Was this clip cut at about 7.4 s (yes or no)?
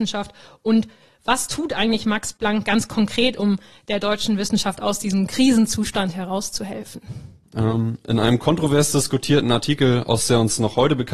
yes